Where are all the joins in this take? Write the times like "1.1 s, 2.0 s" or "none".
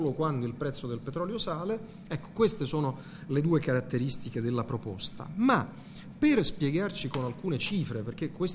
2.0 s

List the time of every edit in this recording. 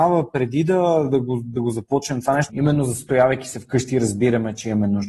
2.5 s

